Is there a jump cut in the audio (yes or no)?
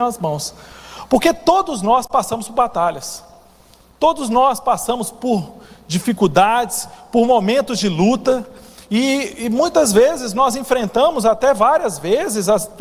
no